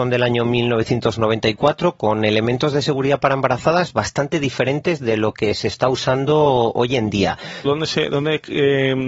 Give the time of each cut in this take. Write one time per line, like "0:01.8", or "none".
0:07.7